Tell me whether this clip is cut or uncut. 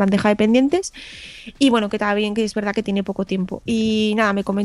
cut